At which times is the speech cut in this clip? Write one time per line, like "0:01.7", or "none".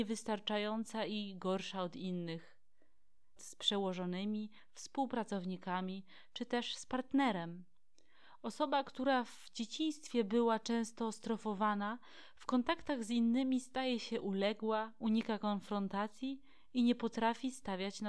0:03.4